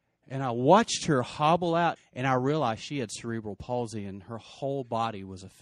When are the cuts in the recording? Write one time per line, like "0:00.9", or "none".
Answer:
0:02.0